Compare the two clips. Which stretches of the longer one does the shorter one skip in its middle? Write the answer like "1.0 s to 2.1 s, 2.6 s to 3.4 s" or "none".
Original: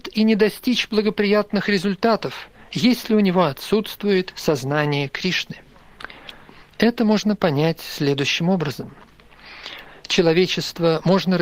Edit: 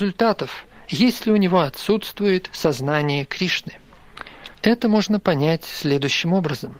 6.4 s to 6.7 s